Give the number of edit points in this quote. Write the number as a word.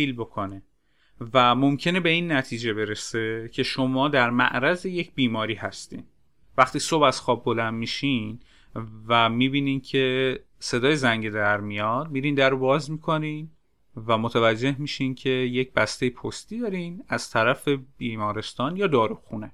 zero